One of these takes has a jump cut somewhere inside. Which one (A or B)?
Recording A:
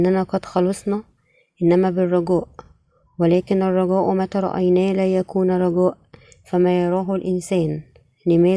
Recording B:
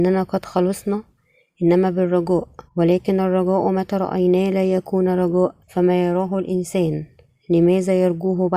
B